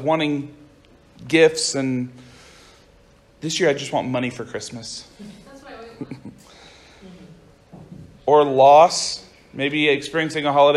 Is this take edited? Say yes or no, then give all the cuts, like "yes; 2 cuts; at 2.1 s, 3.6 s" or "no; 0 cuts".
no; 0 cuts